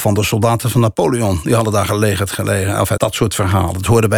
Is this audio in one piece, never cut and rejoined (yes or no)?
no